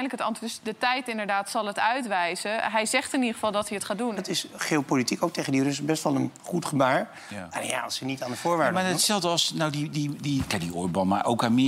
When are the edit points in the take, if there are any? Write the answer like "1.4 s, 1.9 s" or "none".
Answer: 4.2 s